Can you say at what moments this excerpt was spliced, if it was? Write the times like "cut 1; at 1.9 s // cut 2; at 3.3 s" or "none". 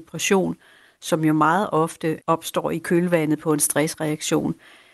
cut 1; at 2.2 s